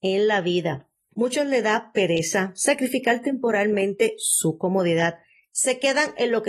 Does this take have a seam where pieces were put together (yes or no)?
yes